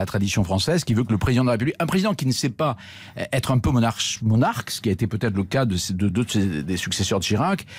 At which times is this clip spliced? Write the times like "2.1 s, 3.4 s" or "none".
none